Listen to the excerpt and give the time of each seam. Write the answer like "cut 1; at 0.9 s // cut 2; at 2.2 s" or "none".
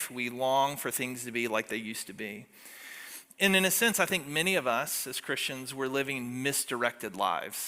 none